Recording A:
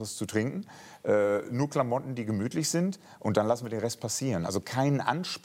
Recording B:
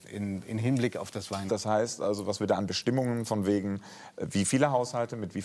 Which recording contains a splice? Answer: B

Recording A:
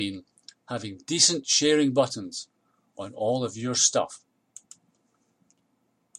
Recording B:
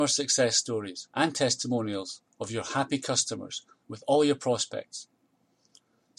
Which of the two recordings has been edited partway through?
B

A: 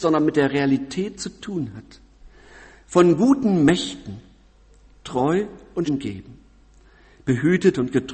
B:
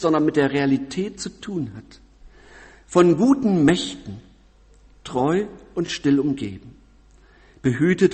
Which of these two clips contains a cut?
A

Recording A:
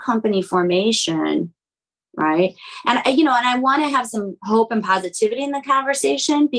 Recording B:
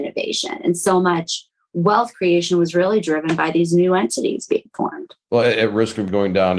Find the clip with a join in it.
A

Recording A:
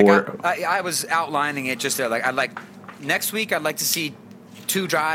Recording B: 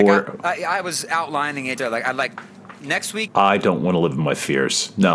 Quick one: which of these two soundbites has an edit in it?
B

